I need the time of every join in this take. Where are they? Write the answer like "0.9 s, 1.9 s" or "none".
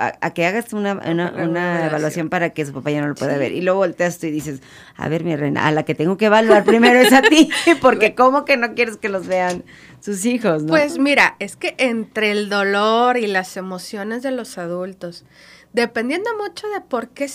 none